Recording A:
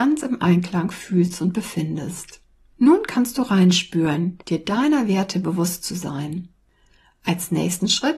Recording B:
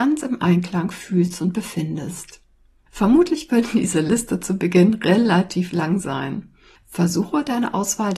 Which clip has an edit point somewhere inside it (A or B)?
A